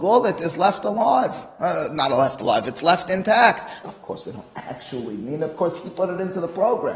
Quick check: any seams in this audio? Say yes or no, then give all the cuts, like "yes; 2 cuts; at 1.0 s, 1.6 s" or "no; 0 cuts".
yes; 1 cut; at 3.8 s